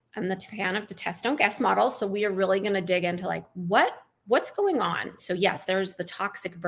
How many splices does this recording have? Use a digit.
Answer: 1